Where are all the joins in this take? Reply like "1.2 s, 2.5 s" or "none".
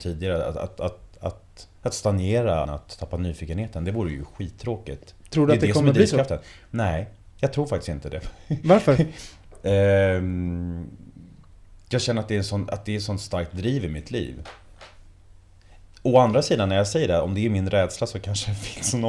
2.6 s